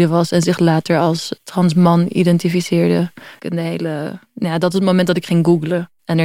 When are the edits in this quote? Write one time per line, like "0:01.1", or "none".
0:01.4
0:03.4